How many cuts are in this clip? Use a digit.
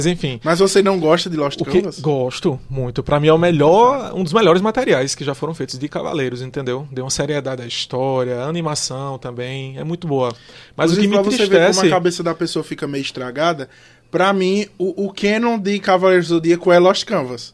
0